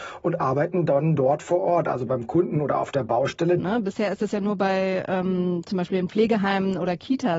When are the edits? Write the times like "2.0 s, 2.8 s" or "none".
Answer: 3.6 s